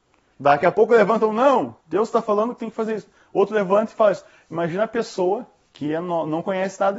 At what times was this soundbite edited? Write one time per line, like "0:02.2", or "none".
none